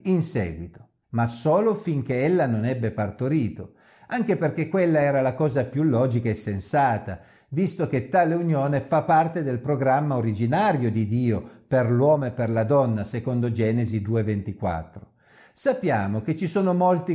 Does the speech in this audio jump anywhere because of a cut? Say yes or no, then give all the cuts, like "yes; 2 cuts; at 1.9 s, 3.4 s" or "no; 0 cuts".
yes; 1 cut; at 1.0 s